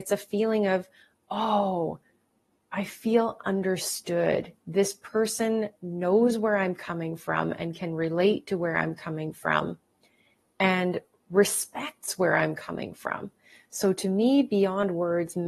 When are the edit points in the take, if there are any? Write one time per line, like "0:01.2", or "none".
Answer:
none